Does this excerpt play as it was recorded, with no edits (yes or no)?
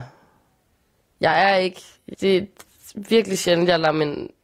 no